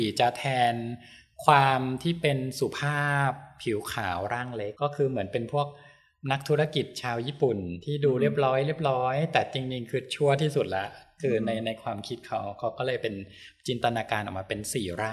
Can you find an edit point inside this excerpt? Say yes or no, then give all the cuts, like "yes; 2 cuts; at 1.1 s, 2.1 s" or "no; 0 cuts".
yes; 1 cut; at 4.7 s